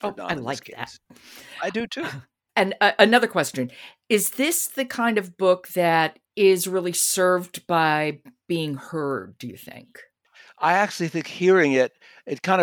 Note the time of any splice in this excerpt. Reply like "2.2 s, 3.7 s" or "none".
6.3 s